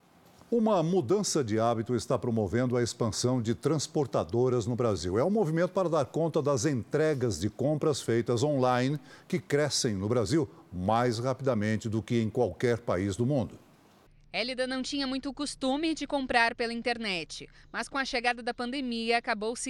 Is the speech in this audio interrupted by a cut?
no; 0 cuts

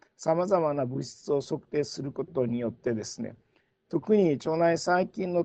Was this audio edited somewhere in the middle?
no; 0 cuts

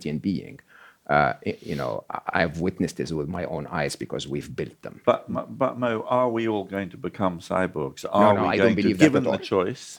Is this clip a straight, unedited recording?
no; 1 cut; at 5.0 s

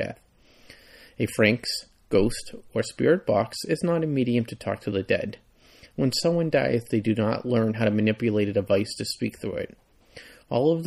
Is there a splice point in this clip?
no; 0 cuts

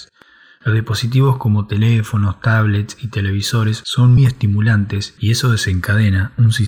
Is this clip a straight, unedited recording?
no; 1 cut; at 4.2 s

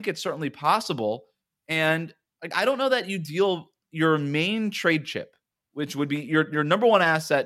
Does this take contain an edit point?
no; 0 cuts

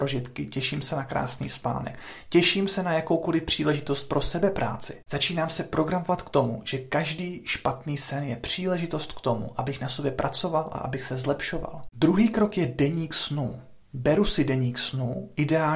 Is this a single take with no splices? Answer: yes; 0 cuts

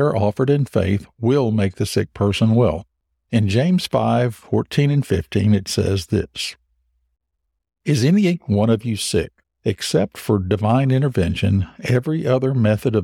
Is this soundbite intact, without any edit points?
no; 2 cuts; at 3.1 s, 9.4 s

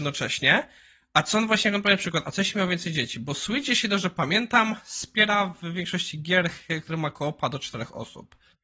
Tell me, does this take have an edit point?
no; 0 cuts

